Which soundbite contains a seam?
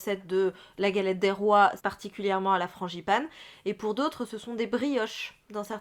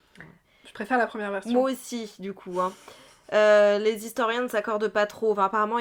first; 1 cut; at 1.8 s

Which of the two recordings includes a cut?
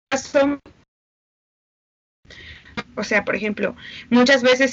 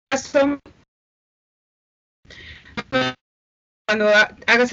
first; 1 cut; at 2.8 s

